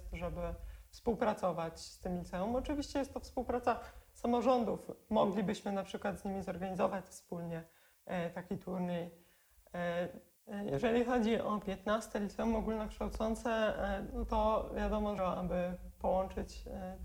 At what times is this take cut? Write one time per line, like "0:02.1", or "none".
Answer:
0:10.4
0:15.2